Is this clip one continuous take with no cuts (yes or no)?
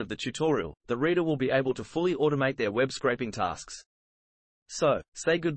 yes